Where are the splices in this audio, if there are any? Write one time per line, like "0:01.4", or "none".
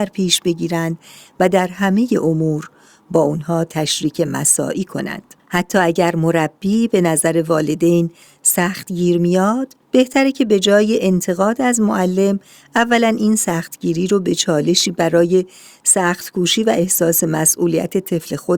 0:05.4
0:09.8